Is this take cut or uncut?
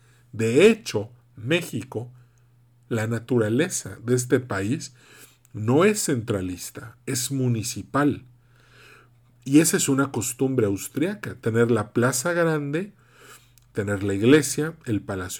uncut